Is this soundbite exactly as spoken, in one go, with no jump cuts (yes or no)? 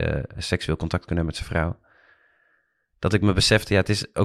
yes